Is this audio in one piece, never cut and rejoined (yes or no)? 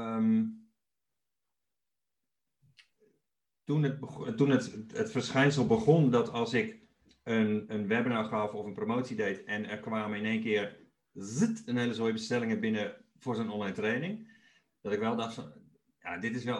yes